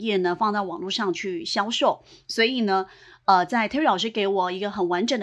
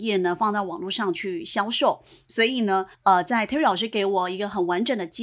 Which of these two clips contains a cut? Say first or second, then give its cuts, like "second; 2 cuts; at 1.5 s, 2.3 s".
second; 1 cut; at 2.9 s